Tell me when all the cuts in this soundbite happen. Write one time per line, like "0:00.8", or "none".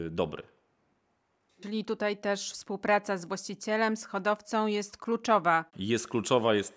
none